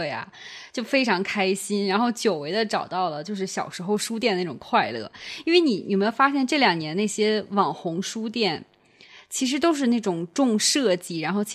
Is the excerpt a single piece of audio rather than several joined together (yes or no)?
yes